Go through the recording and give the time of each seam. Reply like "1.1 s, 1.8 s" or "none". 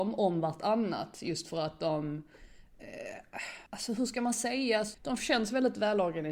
3.7 s, 4.9 s